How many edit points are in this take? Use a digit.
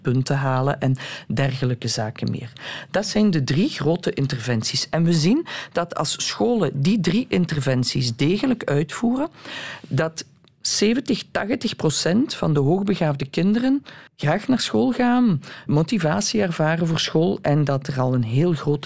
2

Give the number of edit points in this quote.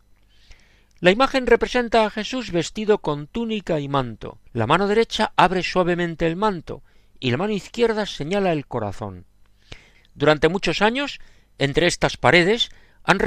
2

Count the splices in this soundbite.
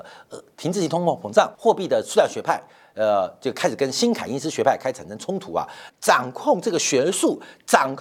2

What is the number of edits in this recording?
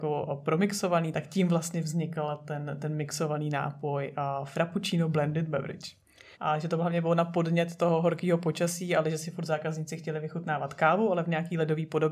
1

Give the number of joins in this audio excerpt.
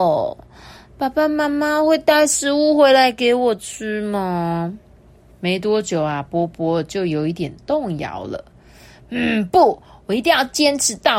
0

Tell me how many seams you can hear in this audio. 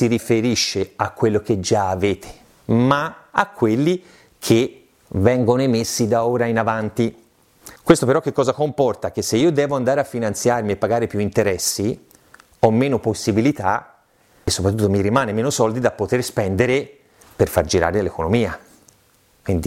0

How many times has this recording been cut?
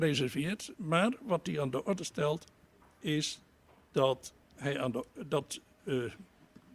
1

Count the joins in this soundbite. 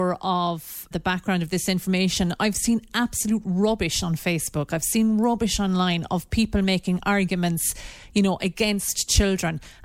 1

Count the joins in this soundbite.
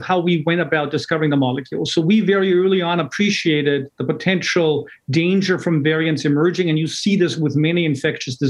0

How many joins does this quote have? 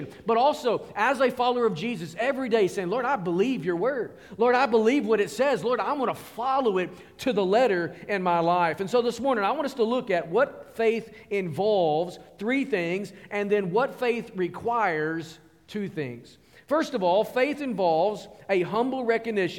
0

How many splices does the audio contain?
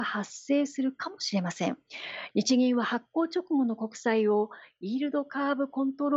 1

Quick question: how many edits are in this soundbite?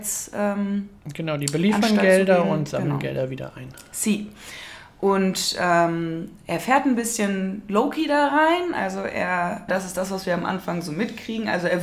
1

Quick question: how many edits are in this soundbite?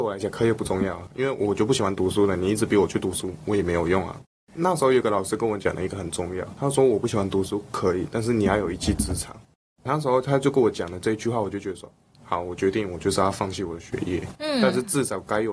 0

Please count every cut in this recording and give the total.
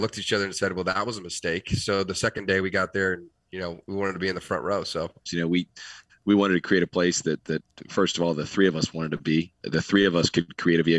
2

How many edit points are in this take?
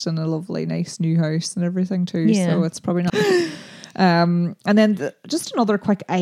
1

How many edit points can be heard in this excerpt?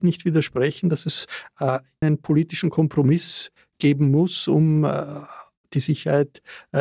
1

